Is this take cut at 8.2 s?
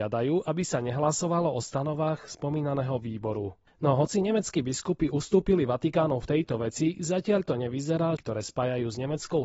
yes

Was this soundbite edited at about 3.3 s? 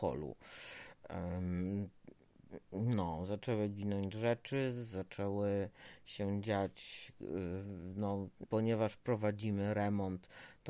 no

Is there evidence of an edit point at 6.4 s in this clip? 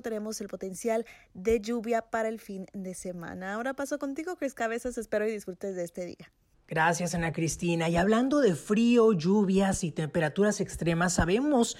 no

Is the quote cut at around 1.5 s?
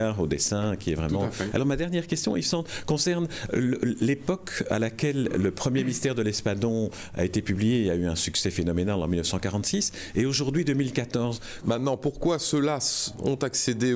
yes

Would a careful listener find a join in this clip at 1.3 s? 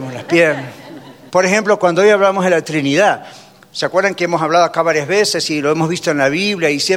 yes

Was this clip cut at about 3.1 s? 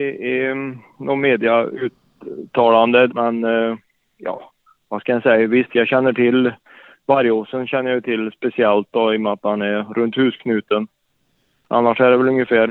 yes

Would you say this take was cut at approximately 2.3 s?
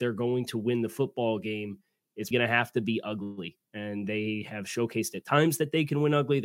yes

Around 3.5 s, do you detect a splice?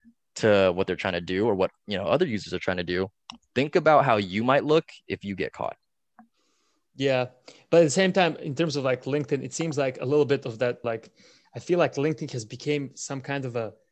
no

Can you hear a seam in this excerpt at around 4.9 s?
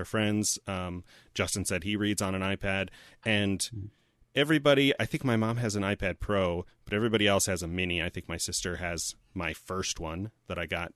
no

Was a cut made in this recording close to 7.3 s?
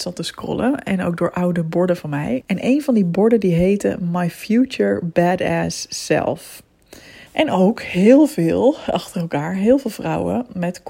yes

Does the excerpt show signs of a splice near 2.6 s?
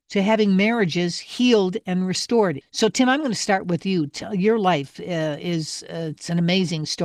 yes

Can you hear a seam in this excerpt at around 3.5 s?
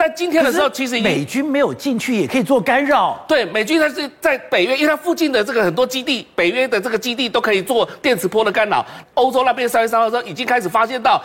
no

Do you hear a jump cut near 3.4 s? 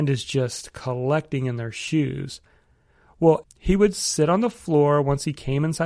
yes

